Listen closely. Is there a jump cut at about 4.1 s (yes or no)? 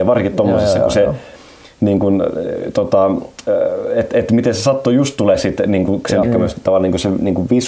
yes